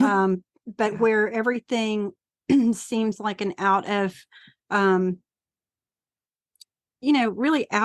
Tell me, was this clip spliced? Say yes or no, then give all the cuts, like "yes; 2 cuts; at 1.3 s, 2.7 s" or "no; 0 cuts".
no; 0 cuts